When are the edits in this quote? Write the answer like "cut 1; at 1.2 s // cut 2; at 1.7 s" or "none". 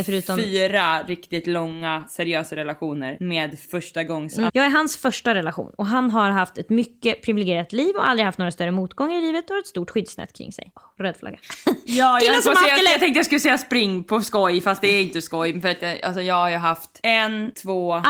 cut 1; at 4.5 s